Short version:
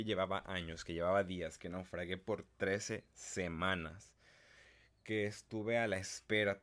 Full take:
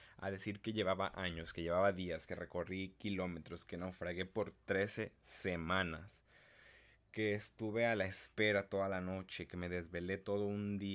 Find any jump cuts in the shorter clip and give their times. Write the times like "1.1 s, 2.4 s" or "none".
1.6 s